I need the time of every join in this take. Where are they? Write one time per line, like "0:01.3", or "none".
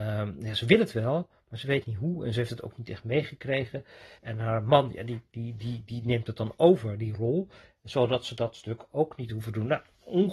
0:04.2